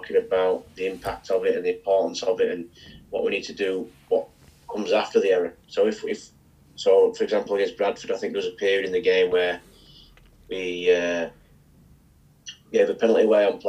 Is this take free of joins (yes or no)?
yes